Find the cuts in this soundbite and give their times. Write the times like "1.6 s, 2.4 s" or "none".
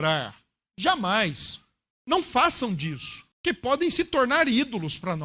1.9 s, 3.3 s